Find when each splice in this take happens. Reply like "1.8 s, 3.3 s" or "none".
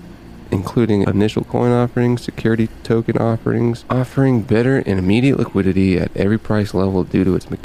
1.0 s, 3.8 s